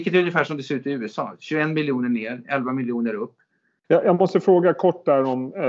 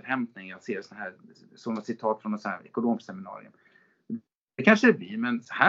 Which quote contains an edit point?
first; 1 cut; at 3.8 s

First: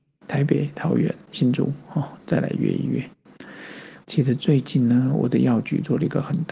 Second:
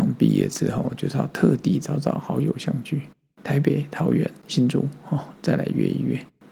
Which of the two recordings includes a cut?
first; 1 cut; at 4.0 s

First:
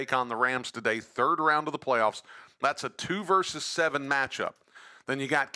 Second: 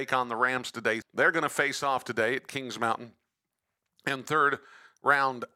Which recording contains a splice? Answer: second; 1 cut; at 1.0 s

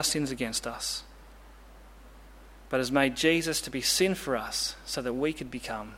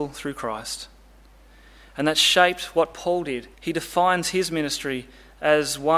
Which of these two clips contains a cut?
second; 1 cut; at 3.5 s

